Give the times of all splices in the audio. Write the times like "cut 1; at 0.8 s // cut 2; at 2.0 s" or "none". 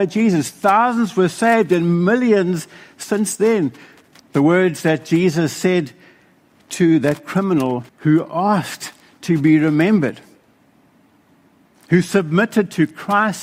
cut 1; at 4.2 s // cut 2; at 7.9 s